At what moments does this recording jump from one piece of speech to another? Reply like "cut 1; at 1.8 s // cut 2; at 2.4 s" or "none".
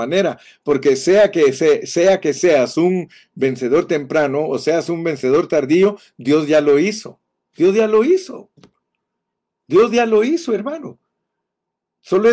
none

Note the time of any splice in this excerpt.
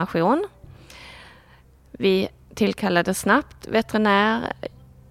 none

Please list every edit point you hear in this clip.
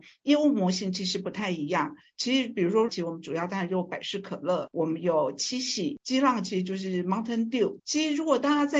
cut 1; at 2.9 s // cut 2; at 6.0 s // cut 3; at 7.8 s

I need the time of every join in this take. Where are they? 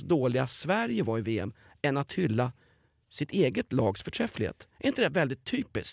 none

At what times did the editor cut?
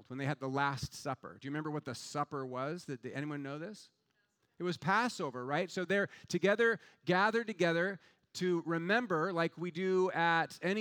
none

